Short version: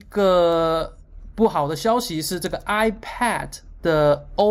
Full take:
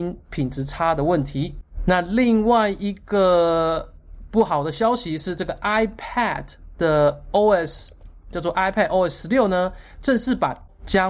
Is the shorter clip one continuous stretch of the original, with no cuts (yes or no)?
yes